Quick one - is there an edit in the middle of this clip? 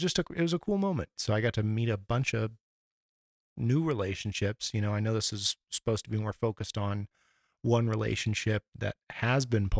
yes; 2 cuts; at 1.2 s, 8.7 s

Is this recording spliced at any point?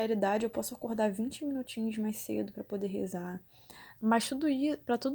yes; 1 cut; at 4.0 s

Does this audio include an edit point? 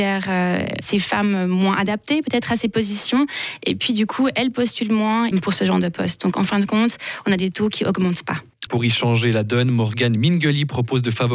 yes; 2 cuts; at 5.3 s, 8.7 s

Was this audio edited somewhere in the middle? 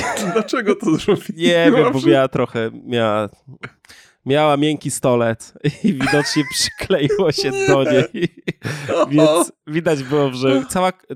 no; 0 cuts

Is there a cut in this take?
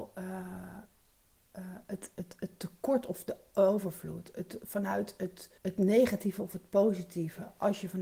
yes; 1 cut; at 5.6 s

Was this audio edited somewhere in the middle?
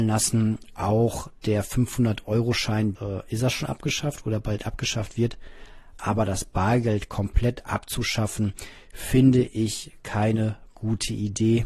yes; 2 cuts; at 3.0 s, 6.0 s

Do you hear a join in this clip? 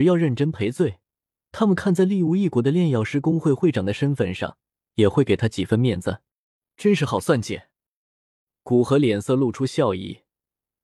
no; 0 cuts

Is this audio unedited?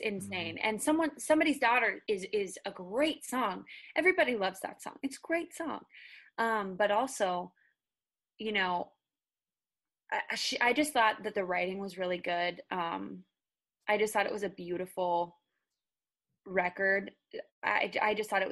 yes; 0 cuts

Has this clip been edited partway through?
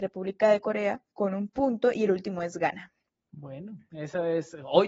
yes; 1 cut; at 1.1 s

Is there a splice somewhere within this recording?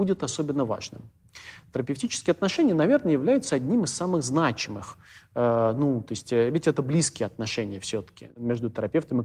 no; 0 cuts

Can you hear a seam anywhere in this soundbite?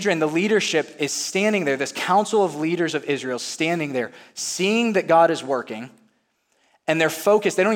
no; 0 cuts

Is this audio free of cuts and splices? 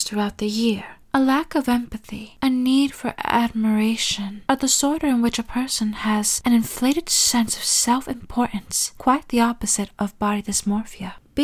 no; 1 cut; at 1.0 s

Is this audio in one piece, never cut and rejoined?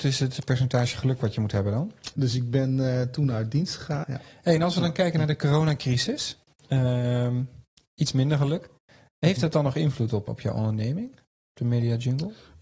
no; 3 cuts; at 2.1 s, 4.0 s, 10.3 s

